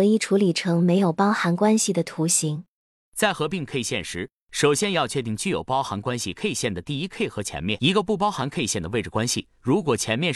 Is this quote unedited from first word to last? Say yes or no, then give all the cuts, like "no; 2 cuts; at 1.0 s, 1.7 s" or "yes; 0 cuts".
no; 1 cut; at 3.0 s